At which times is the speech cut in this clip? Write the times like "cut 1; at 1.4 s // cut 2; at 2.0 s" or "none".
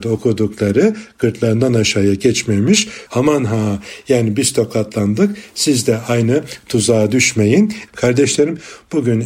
cut 1; at 3.1 s // cut 2; at 7.9 s